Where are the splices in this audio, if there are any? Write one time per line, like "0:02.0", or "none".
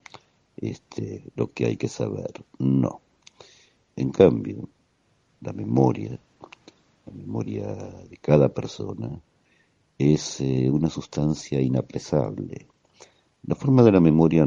0:03.8